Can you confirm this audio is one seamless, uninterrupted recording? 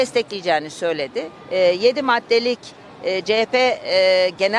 no; 1 cut; at 1.4 s

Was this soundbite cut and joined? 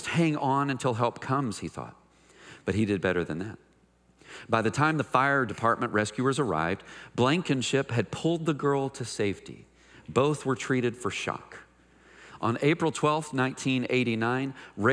no; 0 cuts

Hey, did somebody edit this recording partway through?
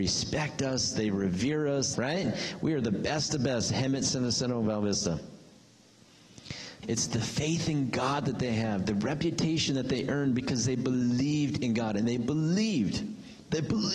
yes; 2 cuts; at 1.9 s, 6.8 s

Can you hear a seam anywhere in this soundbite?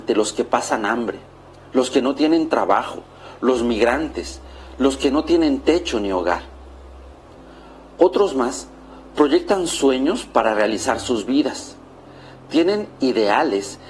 no; 0 cuts

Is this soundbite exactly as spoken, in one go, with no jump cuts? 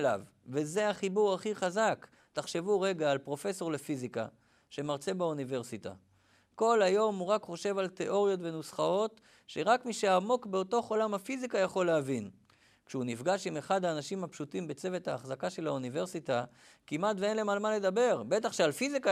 yes; 0 cuts

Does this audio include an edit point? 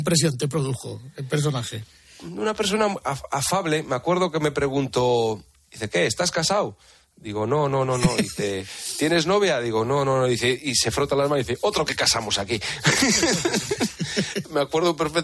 no; 0 cuts

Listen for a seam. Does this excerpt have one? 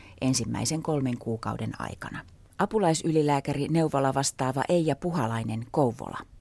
no; 0 cuts

